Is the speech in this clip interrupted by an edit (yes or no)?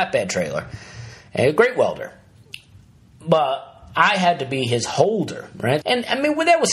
yes